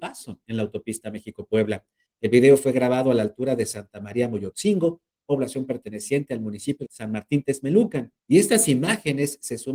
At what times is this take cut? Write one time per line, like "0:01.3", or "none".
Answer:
0:02.1
0:06.9
0:08.2